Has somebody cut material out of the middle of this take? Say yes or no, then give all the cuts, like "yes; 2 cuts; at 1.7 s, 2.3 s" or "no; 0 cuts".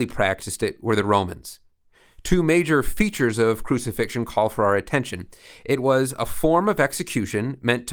no; 0 cuts